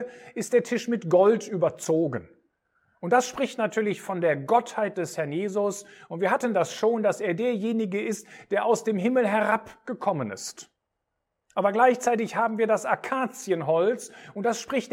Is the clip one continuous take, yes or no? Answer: yes